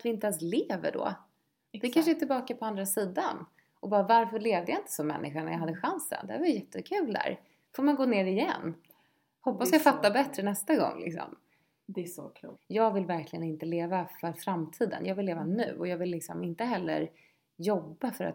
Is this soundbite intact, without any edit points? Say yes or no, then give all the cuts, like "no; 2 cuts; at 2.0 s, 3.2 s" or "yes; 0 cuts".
yes; 0 cuts